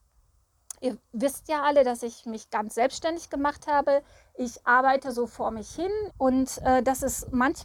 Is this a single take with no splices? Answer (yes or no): no